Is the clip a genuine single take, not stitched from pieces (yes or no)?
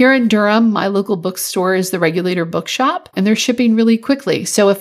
no